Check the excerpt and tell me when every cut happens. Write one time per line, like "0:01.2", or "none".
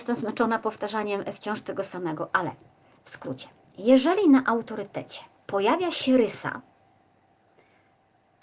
0:05.4